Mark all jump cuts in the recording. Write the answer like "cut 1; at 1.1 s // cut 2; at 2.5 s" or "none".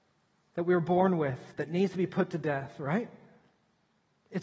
cut 1; at 1.5 s